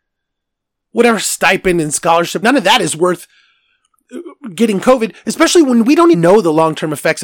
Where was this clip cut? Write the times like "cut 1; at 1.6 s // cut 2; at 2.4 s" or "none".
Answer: cut 1; at 2.4 s // cut 2; at 6.1 s